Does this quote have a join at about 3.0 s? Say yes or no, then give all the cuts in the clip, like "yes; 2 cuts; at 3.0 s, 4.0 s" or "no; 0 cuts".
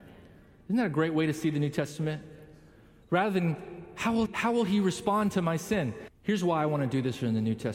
no; 2 cuts; at 4.3 s, 6.1 s